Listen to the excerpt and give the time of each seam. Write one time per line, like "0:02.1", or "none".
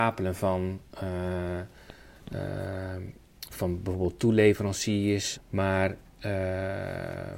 0:03.5
0:05.3